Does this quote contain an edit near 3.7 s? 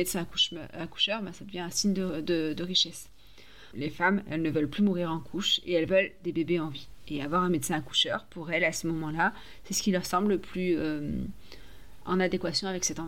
yes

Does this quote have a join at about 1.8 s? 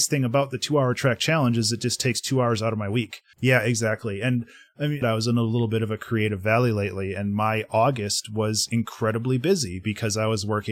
no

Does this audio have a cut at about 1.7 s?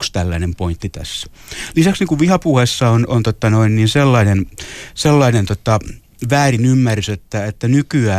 no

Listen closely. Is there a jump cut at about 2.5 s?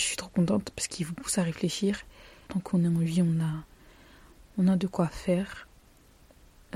yes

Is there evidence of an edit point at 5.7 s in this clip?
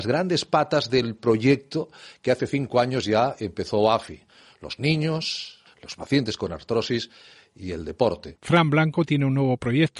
yes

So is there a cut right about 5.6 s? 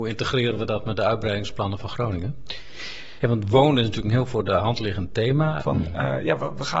yes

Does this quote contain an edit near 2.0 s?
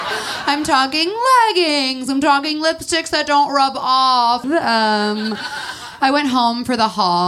no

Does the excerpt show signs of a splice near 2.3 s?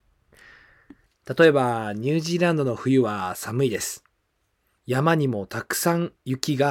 no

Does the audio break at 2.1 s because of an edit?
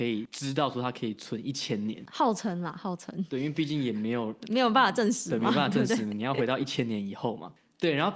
no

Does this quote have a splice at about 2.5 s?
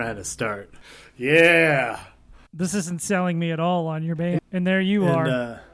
yes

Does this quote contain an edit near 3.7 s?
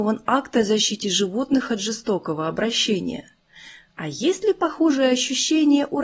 no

